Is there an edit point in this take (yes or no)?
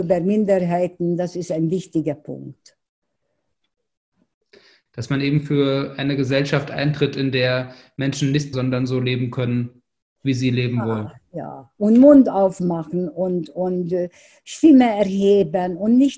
yes